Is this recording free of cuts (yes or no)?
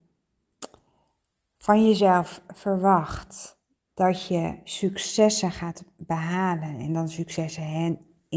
yes